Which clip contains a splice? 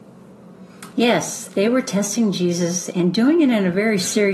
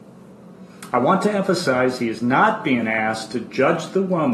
first; 1 cut; at 0.9 s

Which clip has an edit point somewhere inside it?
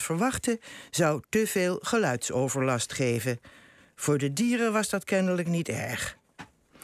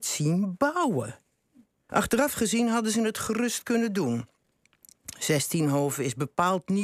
second; 1 cut; at 1.9 s

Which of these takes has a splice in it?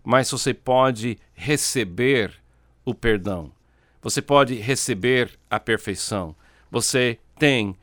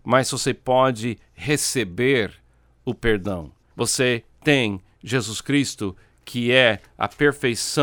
second; 1 cut; at 3.7 s

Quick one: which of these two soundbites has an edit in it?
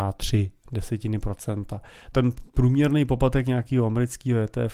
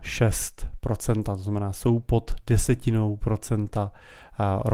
first; 1 cut; at 2.1 s

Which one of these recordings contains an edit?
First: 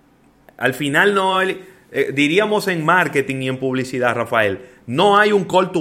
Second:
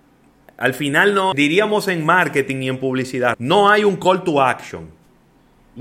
second; 2 cuts; at 1.3 s, 3.3 s

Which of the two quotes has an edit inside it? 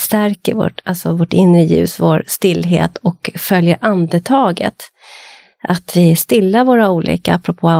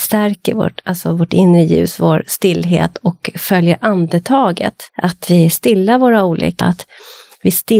second; 2 cuts; at 4.9 s, 6.6 s

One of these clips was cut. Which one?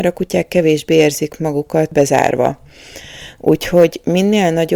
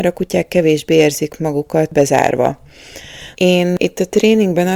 second; 1 cut; at 3.3 s

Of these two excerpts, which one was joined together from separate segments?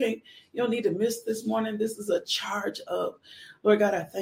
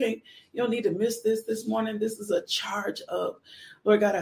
first; 1 cut; at 1.2 s

